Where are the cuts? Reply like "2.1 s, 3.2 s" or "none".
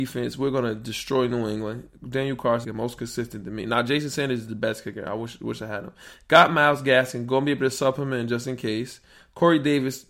2.6 s